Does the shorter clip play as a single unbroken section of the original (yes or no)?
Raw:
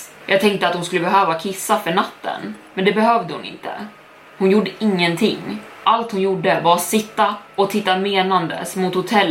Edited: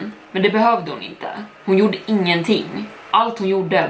no